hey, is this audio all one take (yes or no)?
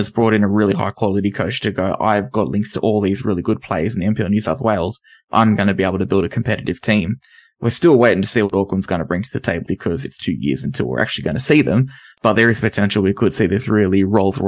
no